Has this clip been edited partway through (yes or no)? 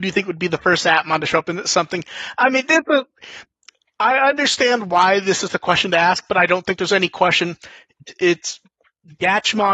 no